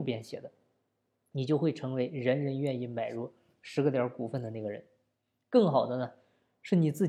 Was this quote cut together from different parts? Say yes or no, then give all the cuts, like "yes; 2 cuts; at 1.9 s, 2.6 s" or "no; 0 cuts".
no; 0 cuts